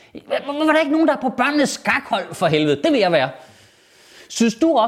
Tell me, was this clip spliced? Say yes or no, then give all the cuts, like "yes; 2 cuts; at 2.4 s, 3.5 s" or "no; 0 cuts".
no; 0 cuts